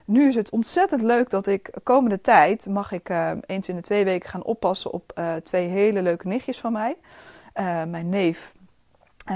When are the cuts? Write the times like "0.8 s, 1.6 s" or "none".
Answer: none